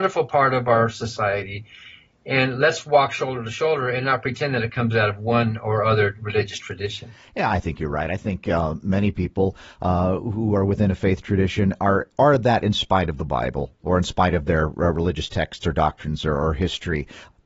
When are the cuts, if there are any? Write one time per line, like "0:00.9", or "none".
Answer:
none